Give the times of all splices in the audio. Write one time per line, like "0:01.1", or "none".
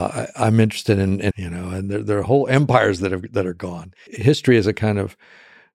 0:01.3
0:04.1